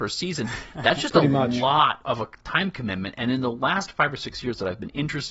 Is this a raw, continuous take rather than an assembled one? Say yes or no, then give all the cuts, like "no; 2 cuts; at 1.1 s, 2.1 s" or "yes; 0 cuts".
no; 1 cut; at 2.0 s